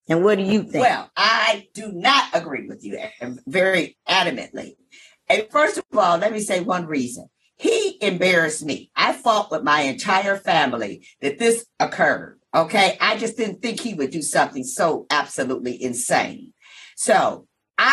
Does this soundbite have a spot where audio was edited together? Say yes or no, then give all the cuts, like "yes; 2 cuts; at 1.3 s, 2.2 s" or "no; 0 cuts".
no; 0 cuts